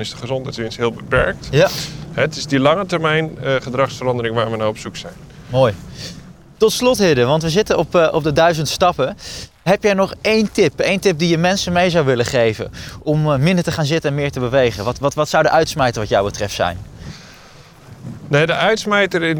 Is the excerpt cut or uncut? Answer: uncut